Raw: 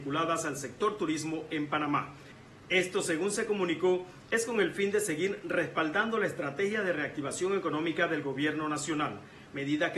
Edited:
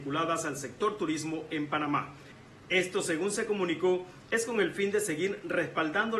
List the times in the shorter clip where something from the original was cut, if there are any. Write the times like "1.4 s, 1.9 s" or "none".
none